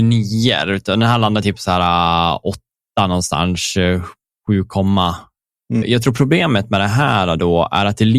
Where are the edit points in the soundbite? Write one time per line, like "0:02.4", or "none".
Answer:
0:05.8